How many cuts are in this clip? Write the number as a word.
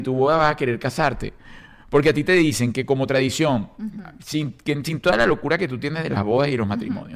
zero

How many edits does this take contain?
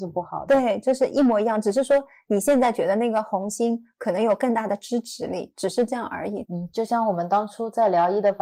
one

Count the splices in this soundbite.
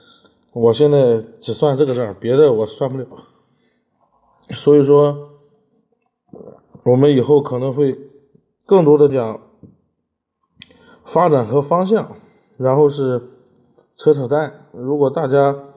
one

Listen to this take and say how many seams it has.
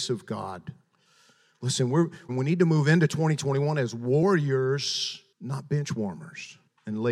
two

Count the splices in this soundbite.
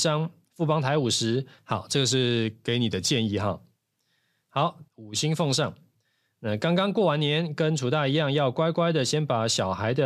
two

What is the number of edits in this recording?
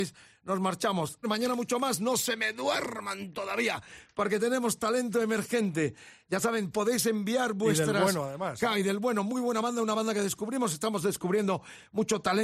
one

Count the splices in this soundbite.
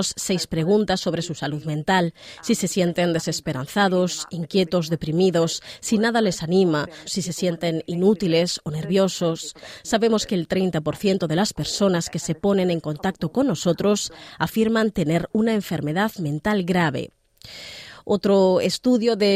one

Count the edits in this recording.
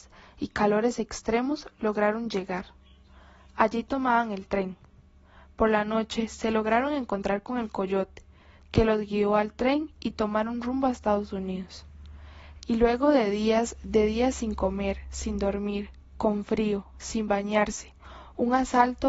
one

